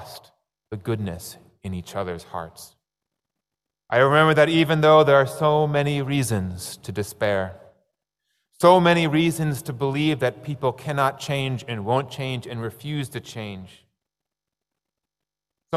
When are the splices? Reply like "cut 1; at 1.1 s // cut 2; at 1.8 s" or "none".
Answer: cut 1; at 3.7 s